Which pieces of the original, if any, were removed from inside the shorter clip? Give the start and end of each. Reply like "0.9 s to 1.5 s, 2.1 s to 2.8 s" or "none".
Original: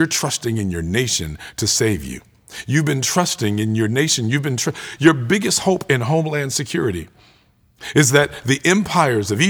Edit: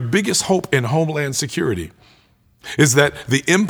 none

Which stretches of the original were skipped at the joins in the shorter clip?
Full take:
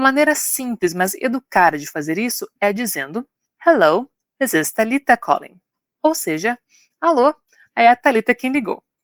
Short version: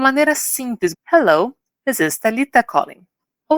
0.9 s to 3.5 s

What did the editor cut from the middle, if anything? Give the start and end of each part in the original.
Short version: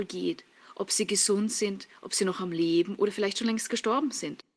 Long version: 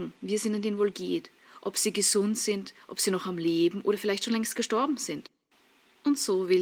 none

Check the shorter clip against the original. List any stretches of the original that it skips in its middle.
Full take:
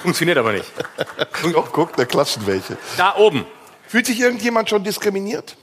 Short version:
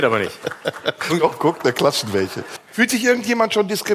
2.9 s to 3.7 s

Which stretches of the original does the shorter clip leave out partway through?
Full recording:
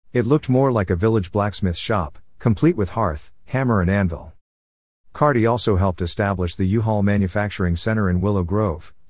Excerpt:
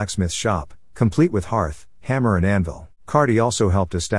4.4 s to 5.0 s

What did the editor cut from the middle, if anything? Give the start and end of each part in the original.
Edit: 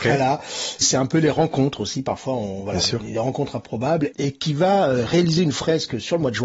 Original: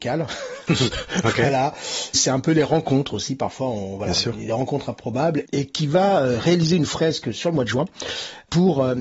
none

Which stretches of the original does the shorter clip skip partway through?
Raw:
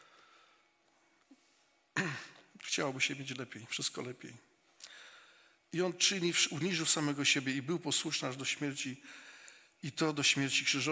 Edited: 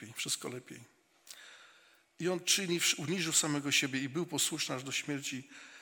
none

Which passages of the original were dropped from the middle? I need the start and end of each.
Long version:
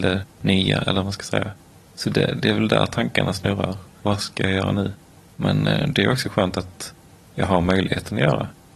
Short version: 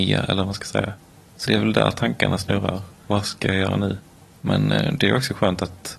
2.0 s to 2.4 s

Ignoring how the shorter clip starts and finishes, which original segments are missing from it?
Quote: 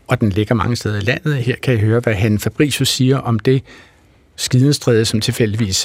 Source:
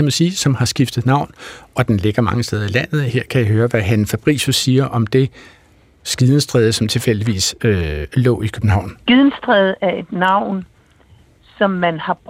none

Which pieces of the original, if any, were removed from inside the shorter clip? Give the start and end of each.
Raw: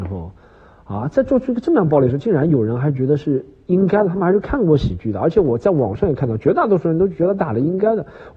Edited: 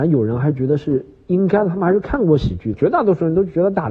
5.1 s to 6.4 s

